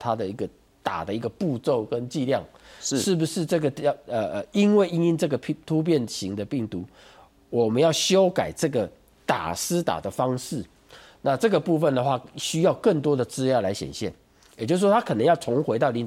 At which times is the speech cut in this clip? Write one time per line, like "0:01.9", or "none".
none